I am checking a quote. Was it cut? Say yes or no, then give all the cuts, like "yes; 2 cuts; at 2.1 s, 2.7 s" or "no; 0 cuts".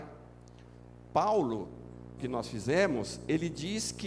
yes; 1 cut; at 2.2 s